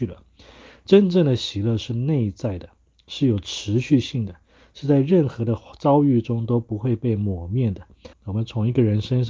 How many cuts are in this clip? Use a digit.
1